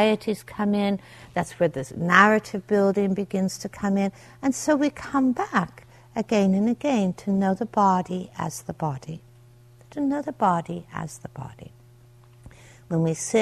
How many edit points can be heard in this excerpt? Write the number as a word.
zero